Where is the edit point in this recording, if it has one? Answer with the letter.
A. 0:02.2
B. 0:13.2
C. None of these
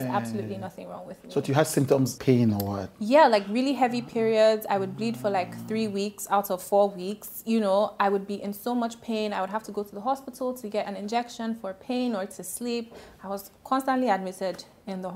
A